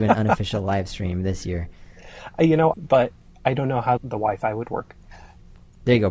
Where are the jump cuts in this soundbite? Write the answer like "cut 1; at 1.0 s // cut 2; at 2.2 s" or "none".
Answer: cut 1; at 2.7 s // cut 2; at 4.0 s